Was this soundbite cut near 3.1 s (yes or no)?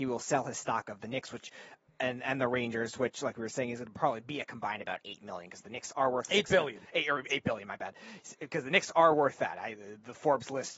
no